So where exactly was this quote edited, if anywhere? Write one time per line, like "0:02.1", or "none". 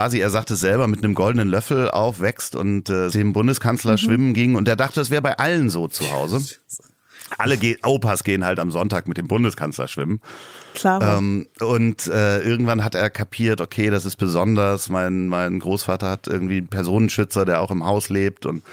0:03.1

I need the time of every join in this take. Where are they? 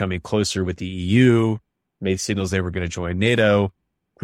none

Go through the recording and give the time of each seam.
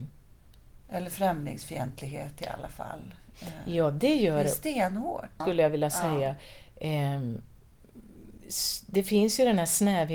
0:05.4

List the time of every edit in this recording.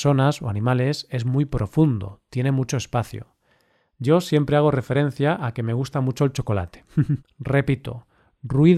0:07.2

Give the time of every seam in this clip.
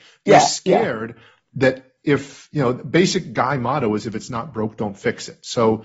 none

